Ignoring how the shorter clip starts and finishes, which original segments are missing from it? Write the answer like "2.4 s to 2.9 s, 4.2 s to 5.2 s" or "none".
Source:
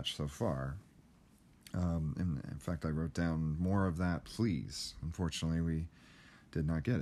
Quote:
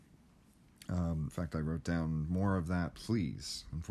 2.1 s to 2.6 s